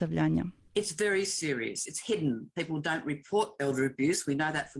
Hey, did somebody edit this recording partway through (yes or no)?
no